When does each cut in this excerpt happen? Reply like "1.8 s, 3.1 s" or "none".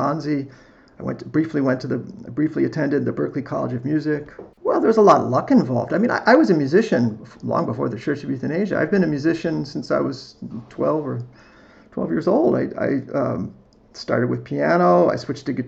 4.5 s